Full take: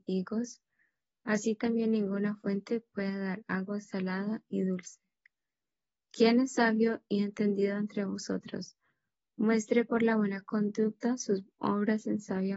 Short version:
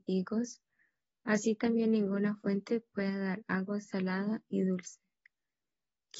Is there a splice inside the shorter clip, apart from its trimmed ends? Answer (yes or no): no